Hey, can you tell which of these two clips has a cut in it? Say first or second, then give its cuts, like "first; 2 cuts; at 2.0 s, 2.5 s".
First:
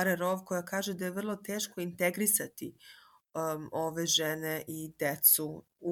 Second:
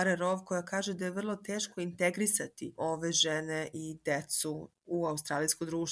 second; 1 cut; at 2.8 s